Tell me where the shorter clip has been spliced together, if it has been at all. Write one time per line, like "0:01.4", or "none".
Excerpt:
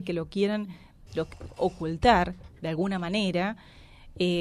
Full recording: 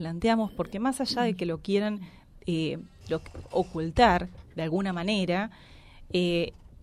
0:01.1

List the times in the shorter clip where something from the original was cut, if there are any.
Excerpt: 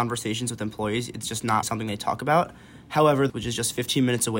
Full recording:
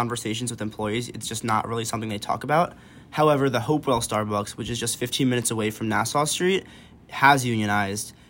0:01.6
0:03.3

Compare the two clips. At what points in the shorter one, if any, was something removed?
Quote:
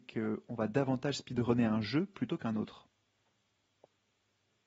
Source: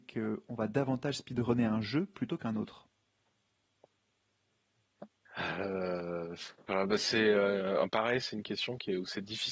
none

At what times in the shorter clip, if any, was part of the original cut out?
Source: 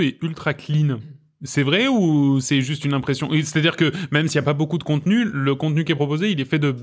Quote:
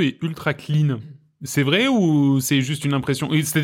none

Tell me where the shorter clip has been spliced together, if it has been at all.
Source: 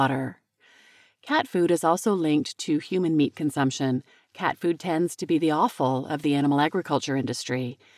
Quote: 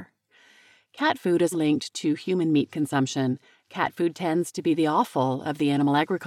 0:01.5

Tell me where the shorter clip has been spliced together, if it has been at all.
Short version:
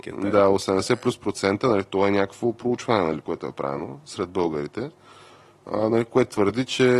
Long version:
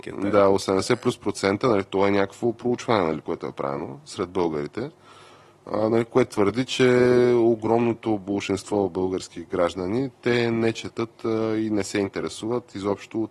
none

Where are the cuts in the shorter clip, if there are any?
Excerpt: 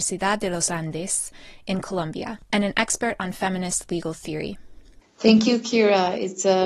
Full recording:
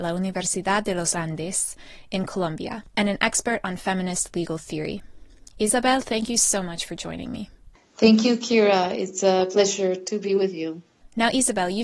0:05.0

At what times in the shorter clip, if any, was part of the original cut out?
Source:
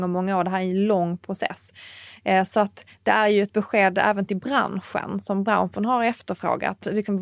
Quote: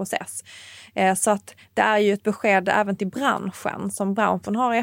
none

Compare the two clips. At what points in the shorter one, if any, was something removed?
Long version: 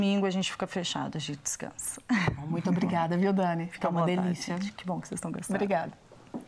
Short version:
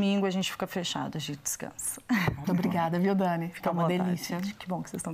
0:02.4

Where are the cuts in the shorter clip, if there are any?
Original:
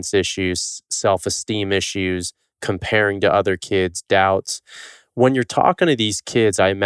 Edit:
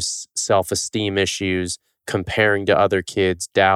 none

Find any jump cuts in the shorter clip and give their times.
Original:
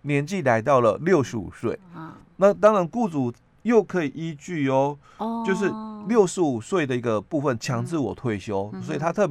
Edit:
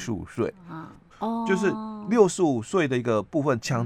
0:01.1

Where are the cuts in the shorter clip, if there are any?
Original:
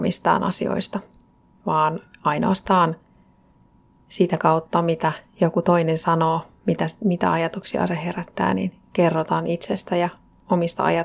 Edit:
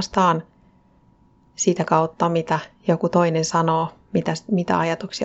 none

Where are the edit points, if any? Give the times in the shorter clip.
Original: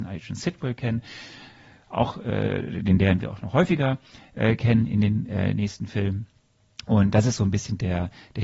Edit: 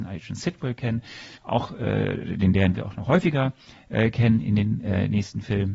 0:01.3

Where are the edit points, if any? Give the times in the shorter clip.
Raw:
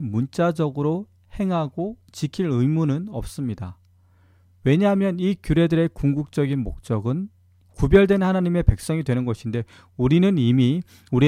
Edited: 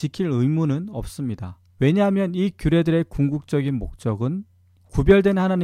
0:01.7

